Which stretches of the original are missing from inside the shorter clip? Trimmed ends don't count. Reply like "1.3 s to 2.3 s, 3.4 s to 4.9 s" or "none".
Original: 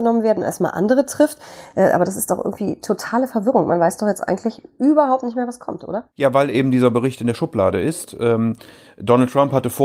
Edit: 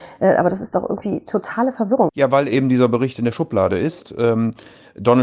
3.6 s to 6.1 s